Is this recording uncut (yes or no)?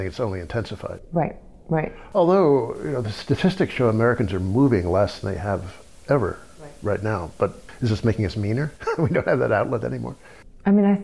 yes